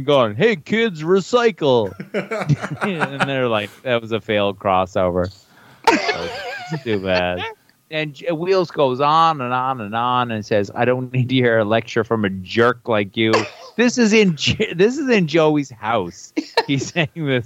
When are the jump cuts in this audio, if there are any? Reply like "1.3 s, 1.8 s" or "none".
none